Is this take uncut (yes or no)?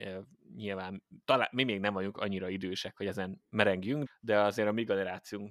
no